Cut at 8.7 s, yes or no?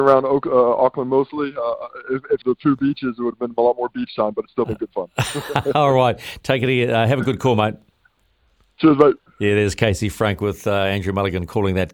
no